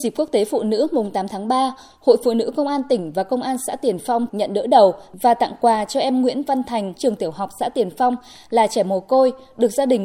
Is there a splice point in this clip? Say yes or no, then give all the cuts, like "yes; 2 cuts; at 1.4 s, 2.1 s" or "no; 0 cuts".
yes; 2 cuts; at 4.3 s, 7.0 s